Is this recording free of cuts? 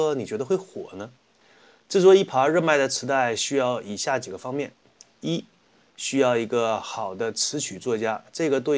no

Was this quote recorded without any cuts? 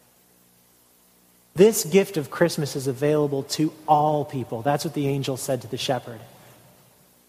yes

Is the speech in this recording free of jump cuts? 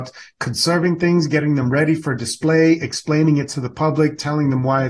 yes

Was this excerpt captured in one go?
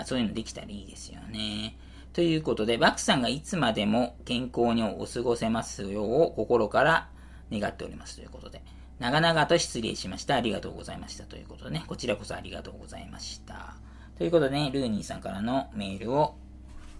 yes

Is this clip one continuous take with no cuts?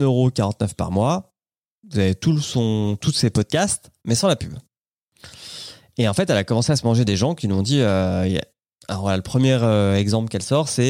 yes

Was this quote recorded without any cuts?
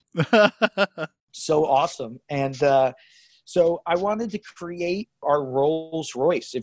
no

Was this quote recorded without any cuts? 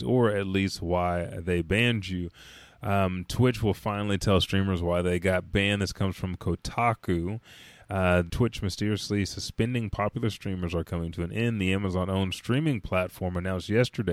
no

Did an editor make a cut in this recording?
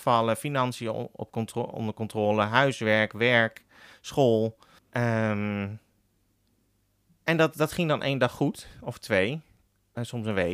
yes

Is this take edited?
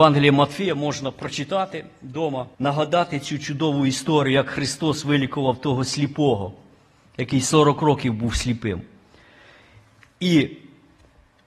yes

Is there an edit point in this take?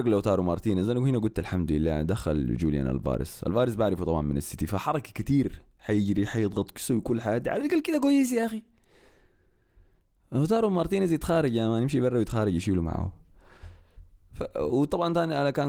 no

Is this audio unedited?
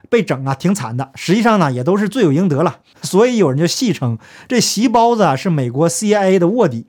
no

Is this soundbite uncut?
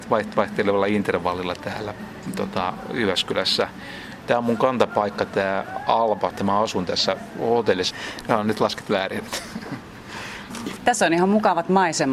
no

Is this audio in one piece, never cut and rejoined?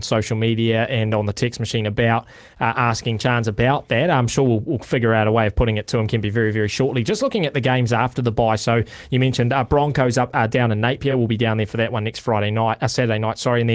yes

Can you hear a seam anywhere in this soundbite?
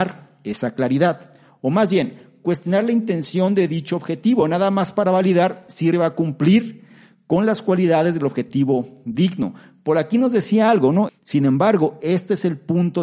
yes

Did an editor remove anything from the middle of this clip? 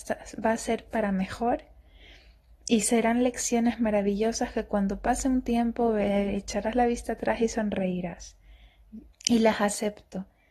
yes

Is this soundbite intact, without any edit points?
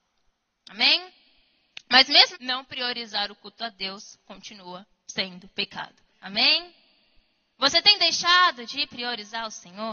no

